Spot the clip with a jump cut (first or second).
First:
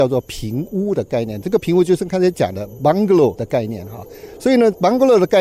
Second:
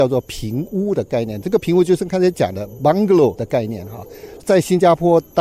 second